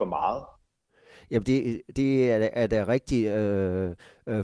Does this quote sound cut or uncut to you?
uncut